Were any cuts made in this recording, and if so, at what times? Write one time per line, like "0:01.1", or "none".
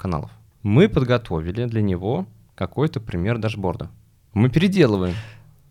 0:04.3